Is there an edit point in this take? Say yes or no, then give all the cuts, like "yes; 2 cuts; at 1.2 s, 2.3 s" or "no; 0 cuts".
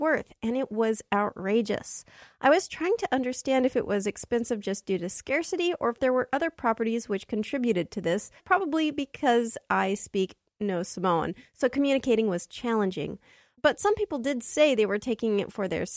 yes; 1 cut; at 8.4 s